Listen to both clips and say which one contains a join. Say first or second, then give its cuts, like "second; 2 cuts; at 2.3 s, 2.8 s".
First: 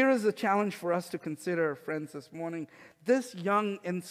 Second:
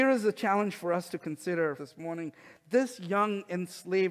second; 1 cut; at 1.8 s